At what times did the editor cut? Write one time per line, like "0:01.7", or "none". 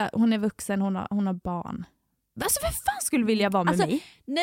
none